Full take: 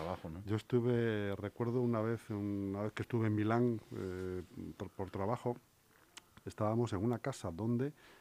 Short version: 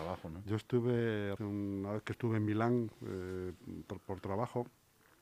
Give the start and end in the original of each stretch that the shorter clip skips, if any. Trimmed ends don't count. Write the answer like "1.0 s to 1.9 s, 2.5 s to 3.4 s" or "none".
1.4 s to 2.3 s